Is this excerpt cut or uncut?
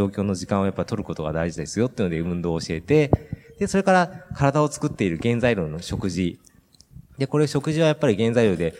uncut